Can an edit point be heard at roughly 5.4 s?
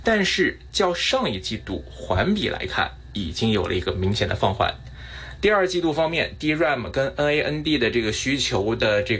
yes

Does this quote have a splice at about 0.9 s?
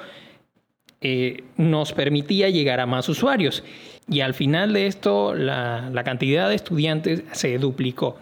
no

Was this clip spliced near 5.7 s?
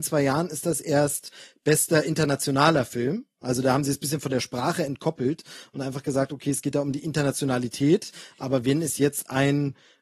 no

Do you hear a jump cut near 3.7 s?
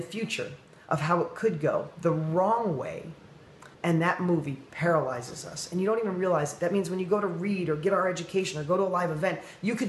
yes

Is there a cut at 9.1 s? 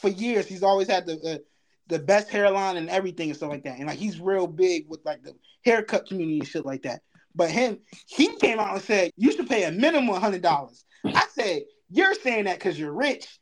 yes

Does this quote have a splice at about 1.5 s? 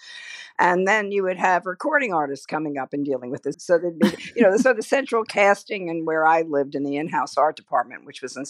no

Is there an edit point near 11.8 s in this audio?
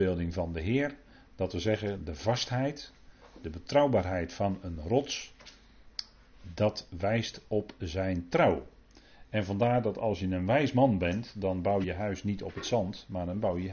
yes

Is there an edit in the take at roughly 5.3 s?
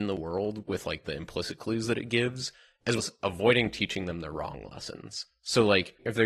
no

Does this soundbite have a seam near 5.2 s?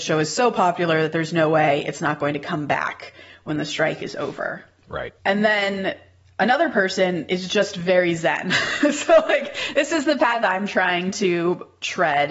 yes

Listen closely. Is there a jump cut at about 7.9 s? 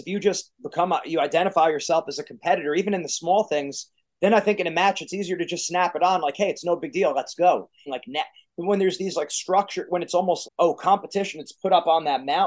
yes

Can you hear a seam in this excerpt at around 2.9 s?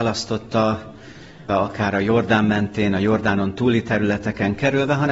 no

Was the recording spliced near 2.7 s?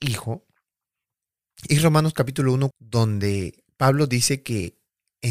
yes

